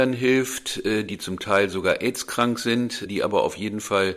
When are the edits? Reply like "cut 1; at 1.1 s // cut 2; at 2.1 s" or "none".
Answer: cut 1; at 3.1 s

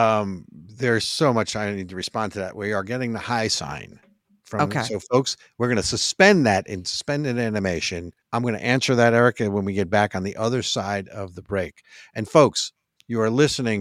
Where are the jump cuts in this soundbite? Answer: cut 1; at 8.2 s

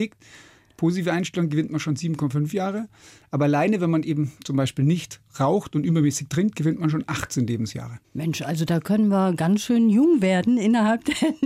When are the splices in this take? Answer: none

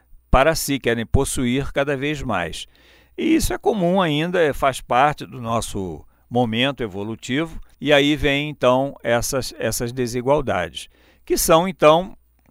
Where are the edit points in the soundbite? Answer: cut 1; at 7.7 s

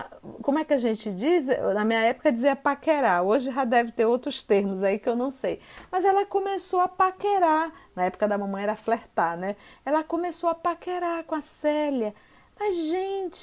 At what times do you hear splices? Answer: none

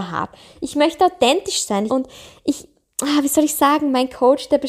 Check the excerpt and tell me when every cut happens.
cut 1; at 1.9 s

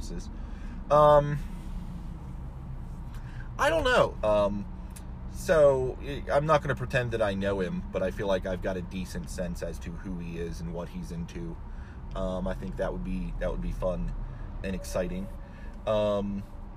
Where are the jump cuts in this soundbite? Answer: cut 1; at 4.2 s // cut 2; at 12.1 s // cut 3; at 14.6 s

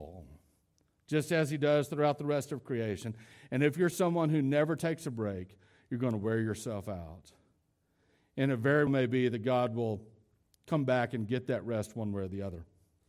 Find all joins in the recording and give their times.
cut 1; at 8.9 s

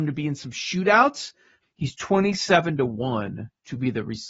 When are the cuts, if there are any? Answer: cut 1; at 1.6 s

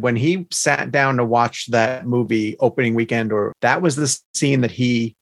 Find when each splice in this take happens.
cut 1; at 3.5 s

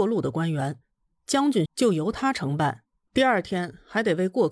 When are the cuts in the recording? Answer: cut 1; at 1.7 s // cut 2; at 3.1 s

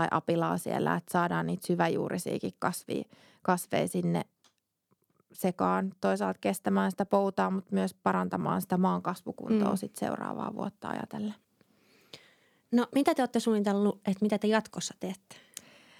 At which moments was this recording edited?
none

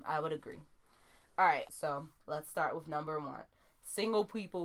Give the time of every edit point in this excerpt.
cut 1; at 1.7 s

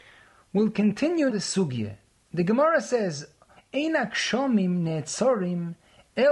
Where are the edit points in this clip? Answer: cut 1; at 1.3 s // cut 2; at 3.6 s

